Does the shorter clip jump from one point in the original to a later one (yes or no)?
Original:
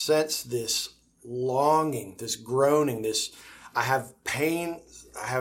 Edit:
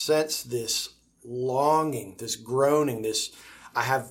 no